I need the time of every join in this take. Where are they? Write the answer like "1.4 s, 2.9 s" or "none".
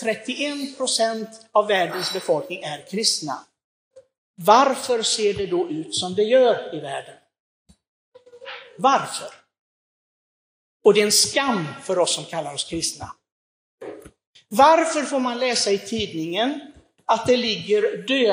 none